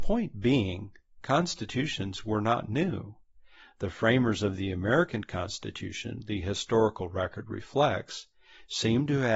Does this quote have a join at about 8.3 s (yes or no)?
no